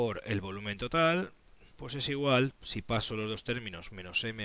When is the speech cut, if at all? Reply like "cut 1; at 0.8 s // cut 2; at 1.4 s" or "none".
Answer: cut 1; at 1.7 s

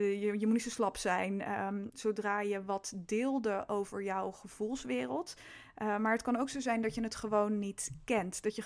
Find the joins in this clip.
cut 1; at 1.9 s

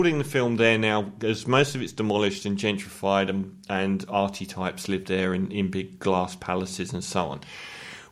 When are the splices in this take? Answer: none

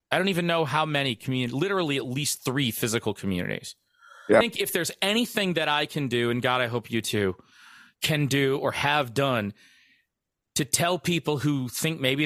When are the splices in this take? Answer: cut 1; at 4.4 s

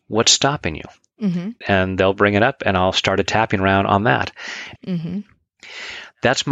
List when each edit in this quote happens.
cut 1; at 1.6 s // cut 2; at 4.8 s

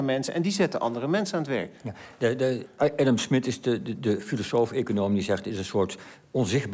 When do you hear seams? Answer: none

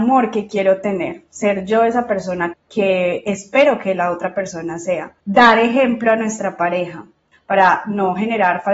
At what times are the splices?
cut 1; at 2.5 s // cut 2; at 7.3 s

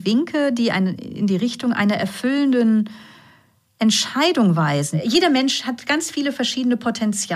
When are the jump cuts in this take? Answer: none

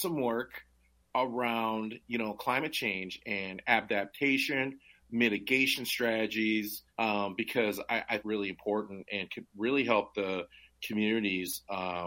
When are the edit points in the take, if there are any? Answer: cut 1; at 6.9 s // cut 2; at 8.2 s

